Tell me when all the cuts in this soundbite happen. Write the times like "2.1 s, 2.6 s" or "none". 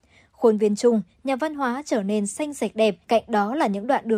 3.0 s